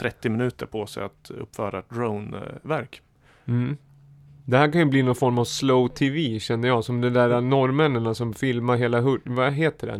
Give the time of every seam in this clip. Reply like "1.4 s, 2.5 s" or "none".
none